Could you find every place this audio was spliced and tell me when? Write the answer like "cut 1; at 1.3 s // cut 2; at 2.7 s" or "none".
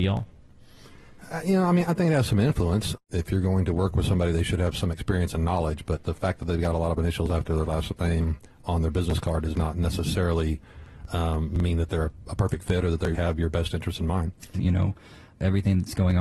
cut 1; at 13.1 s // cut 2; at 14.5 s

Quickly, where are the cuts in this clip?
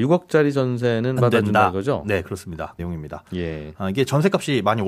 cut 1; at 1.2 s // cut 2; at 2.8 s

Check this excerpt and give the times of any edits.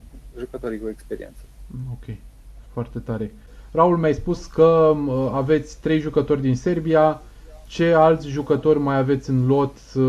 cut 1; at 2.6 s

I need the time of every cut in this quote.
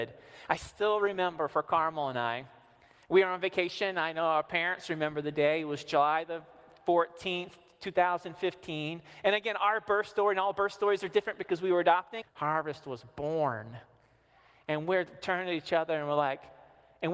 cut 1; at 12.2 s

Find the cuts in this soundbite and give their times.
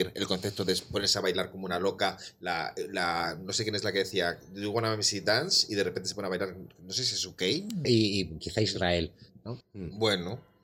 cut 1; at 7.8 s // cut 2; at 9.6 s

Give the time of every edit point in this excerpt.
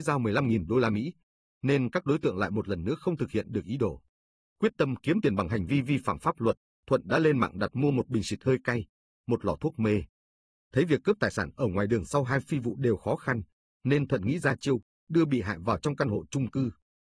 none

